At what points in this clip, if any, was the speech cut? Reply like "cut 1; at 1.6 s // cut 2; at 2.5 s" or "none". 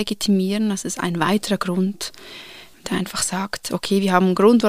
none